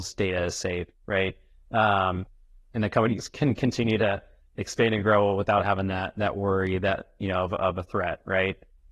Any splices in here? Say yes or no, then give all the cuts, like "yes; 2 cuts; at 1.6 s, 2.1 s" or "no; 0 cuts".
no; 0 cuts